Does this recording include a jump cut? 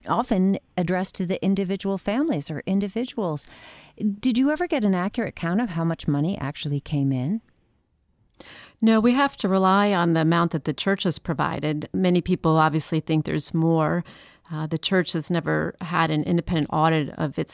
no; 0 cuts

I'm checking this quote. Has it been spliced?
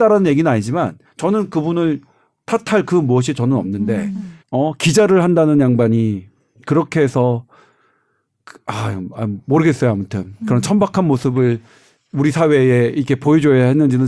yes; 1 cut; at 4.4 s

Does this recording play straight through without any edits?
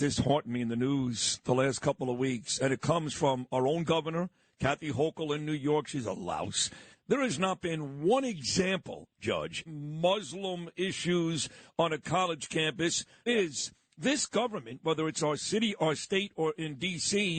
no; 3 cuts; at 6.9 s, 9.7 s, 13.3 s

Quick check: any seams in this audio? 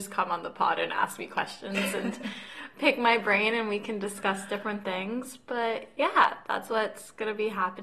no; 0 cuts

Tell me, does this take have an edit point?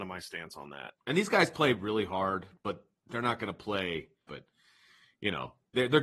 yes; 2 cuts; at 1.0 s, 4.3 s

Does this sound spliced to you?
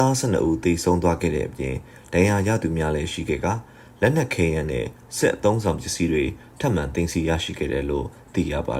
no; 0 cuts

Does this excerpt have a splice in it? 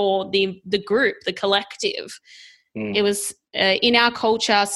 yes; 1 cut; at 2.9 s

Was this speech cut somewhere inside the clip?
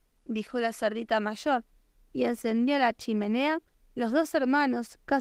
yes; 1 cut; at 3.7 s

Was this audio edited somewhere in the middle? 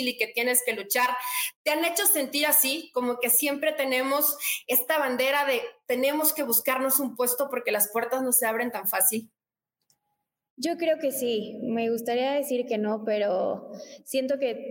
no; 0 cuts

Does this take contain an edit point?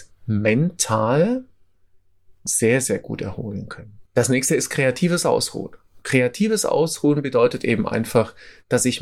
yes; 1 cut; at 4.1 s

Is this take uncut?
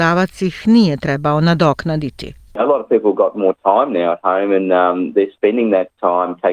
yes; 0 cuts

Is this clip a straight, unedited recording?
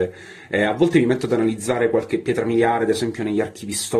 yes; 0 cuts

